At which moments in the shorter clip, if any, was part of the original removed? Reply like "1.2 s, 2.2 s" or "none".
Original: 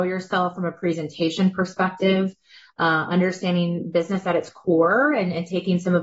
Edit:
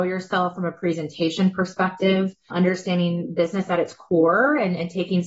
2.5 s